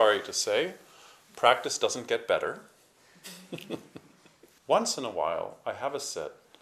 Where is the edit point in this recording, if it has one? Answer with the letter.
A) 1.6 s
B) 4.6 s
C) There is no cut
B